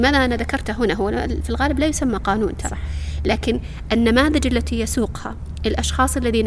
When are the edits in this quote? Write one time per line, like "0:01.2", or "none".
none